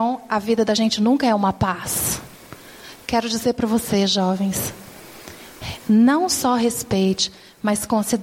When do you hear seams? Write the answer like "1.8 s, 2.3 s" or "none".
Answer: none